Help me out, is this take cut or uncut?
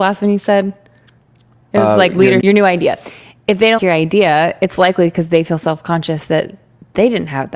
cut